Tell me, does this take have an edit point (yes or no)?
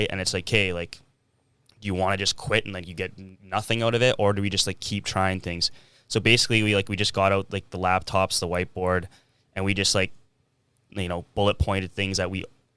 no